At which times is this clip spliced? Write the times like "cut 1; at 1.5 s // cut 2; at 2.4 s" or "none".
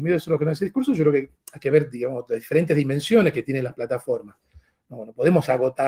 none

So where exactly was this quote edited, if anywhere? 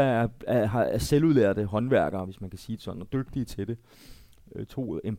none

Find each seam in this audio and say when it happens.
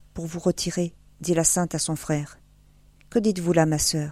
cut 1; at 3.0 s

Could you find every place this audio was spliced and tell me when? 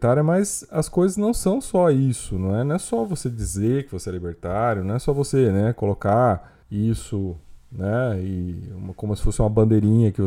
cut 1; at 6.6 s

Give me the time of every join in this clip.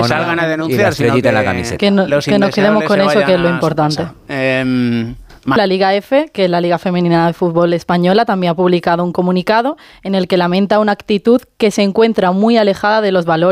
cut 1; at 5.6 s

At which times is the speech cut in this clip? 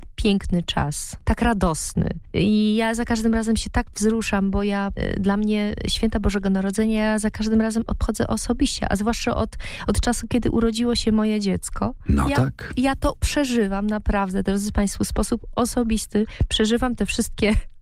none

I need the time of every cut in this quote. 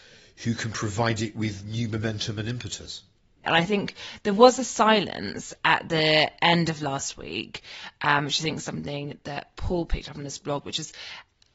cut 1; at 3.4 s

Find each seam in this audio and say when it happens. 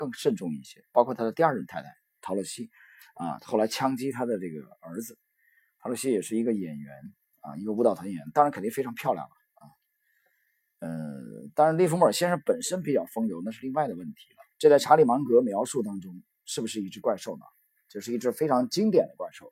cut 1; at 14.5 s

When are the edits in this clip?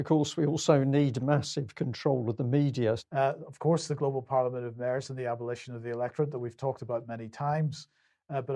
cut 1; at 3.0 s

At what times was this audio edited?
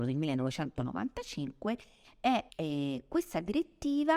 cut 1; at 2.5 s

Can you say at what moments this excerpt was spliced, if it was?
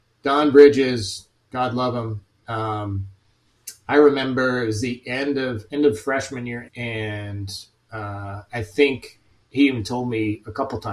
cut 1; at 6.7 s

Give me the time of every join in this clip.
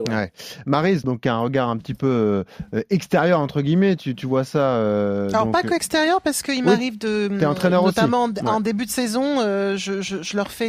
cut 1; at 1.0 s

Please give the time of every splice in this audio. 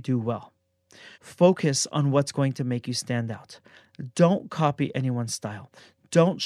cut 1; at 1.1 s

